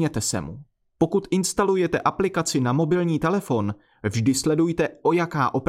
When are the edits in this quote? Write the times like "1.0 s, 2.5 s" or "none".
0.9 s